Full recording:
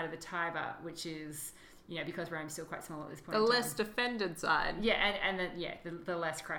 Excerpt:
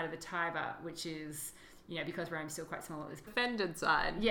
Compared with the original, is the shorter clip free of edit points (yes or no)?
no